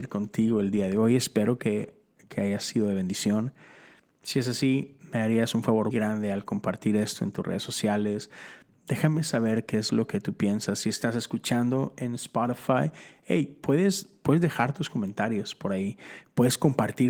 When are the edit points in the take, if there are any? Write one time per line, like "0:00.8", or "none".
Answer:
0:05.9